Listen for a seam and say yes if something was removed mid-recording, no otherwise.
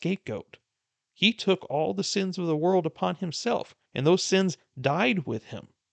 yes